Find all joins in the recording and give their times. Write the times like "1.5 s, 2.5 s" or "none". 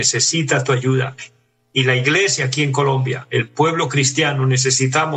none